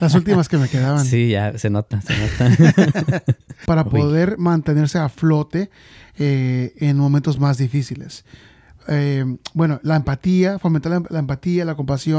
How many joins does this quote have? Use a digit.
1